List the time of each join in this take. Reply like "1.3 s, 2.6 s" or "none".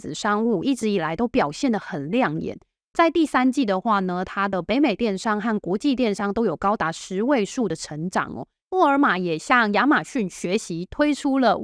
8.6 s